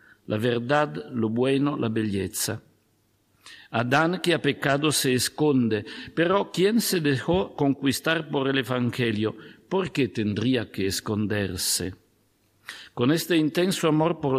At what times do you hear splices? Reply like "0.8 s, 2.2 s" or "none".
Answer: none